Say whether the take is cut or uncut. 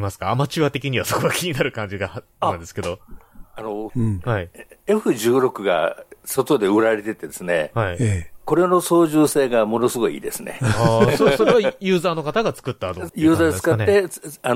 cut